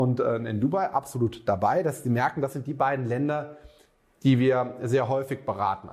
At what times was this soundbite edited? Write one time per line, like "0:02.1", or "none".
none